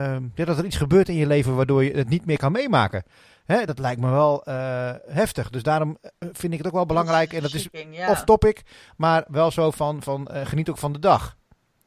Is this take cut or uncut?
uncut